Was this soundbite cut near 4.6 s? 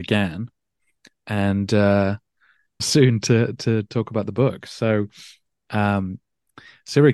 no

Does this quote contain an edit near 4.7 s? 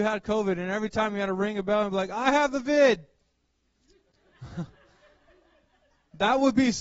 no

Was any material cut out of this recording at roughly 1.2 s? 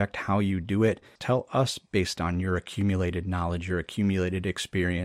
yes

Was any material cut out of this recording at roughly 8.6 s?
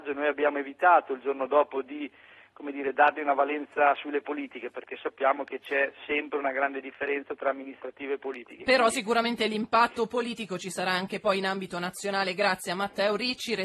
no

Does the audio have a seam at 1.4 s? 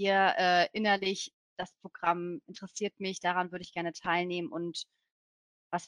no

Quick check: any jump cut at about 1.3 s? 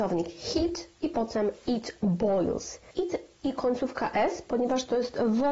no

